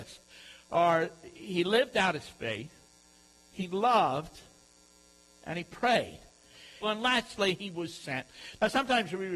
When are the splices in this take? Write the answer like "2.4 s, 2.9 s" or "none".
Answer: 6.8 s